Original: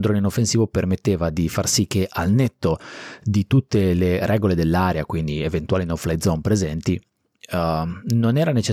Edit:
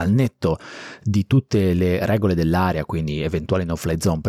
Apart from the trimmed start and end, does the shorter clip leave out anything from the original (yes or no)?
no